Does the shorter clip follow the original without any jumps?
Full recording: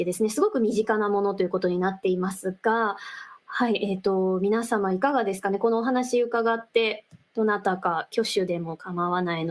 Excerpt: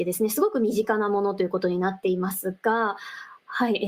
yes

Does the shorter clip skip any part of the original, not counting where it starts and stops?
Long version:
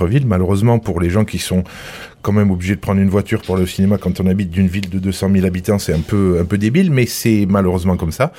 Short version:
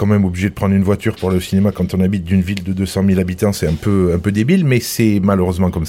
no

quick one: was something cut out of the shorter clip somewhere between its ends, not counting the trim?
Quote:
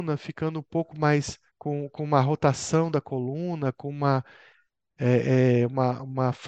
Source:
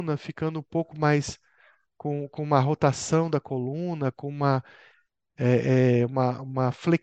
yes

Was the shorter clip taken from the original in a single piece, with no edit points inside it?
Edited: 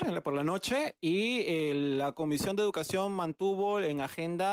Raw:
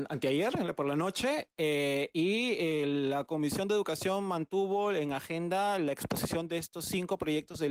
no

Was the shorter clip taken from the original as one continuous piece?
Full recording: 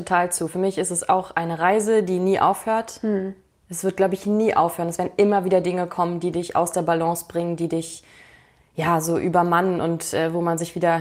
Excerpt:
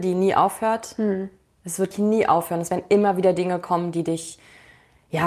no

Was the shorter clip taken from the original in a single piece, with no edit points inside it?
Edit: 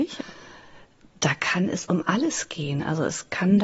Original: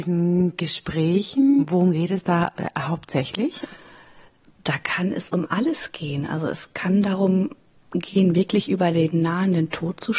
yes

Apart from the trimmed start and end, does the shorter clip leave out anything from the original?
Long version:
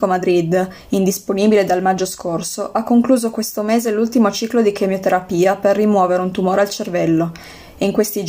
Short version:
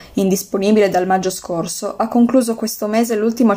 no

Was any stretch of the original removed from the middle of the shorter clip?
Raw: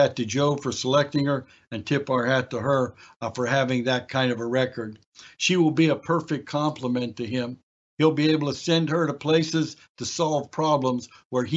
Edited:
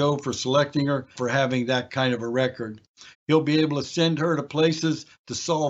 yes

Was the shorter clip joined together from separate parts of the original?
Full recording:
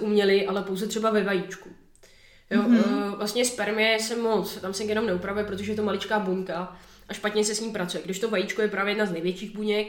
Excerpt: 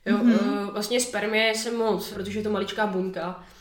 yes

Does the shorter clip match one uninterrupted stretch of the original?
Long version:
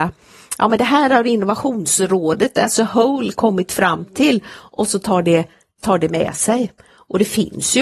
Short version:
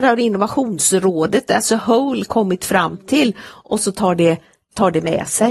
yes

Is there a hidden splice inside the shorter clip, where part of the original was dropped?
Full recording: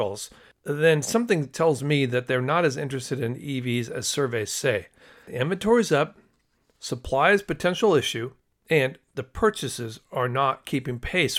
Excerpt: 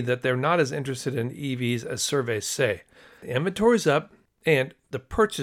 yes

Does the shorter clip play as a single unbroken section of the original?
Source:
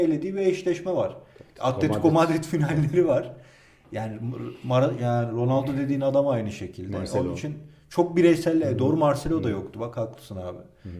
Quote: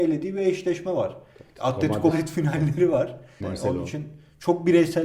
no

